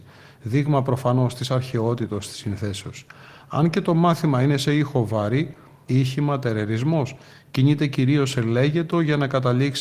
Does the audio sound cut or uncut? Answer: cut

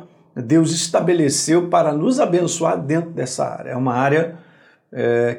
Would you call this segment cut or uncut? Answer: uncut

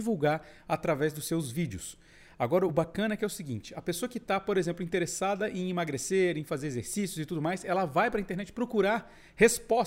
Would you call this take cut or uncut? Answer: uncut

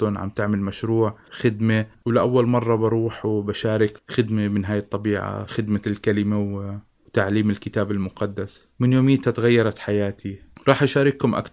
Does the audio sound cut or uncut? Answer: cut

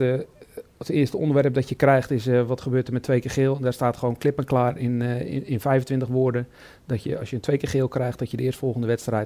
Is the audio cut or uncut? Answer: uncut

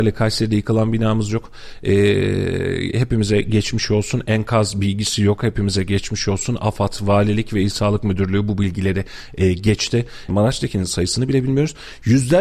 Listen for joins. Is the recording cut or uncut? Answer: cut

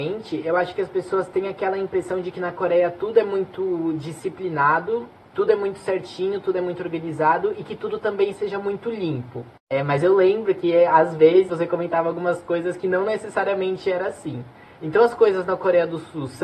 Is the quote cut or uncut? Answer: cut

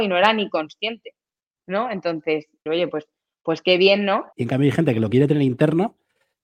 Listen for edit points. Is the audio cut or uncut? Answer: cut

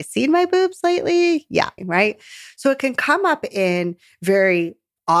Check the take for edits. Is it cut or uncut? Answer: cut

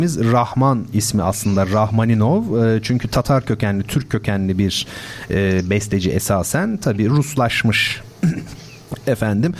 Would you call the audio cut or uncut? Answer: uncut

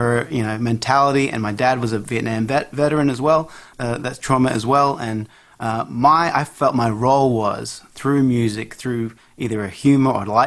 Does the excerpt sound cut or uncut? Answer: cut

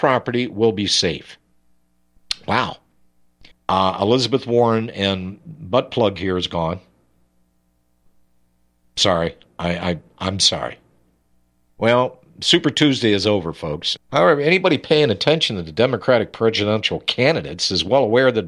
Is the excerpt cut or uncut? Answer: cut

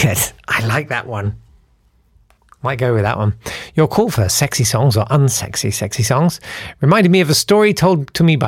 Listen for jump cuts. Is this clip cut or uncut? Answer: uncut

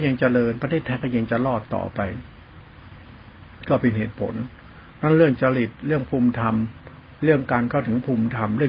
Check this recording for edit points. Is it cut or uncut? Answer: uncut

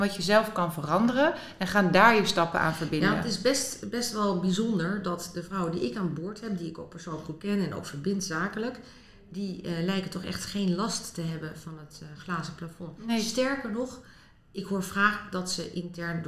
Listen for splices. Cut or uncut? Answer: uncut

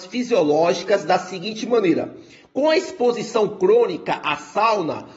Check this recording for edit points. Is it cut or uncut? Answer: uncut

